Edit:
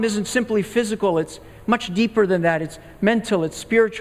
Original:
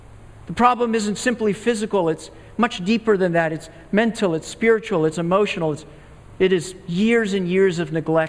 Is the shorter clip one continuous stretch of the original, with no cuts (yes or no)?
yes